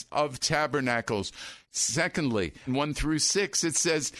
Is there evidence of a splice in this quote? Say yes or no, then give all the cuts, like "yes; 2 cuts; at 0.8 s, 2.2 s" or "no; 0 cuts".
yes; 2 cuts; at 1.6 s, 2.7 s